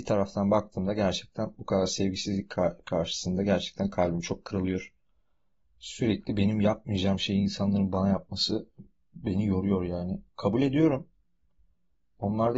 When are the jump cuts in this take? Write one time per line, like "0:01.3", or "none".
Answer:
0:05.6